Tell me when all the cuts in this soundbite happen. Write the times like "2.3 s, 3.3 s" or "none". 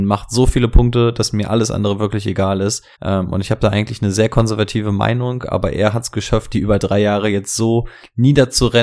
2.9 s